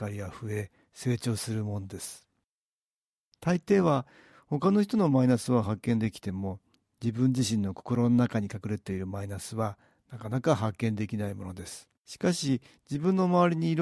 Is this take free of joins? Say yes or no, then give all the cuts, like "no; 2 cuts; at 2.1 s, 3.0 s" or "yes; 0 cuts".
no; 1 cut; at 12.0 s